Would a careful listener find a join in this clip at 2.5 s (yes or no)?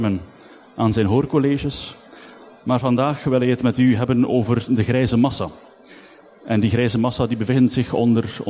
no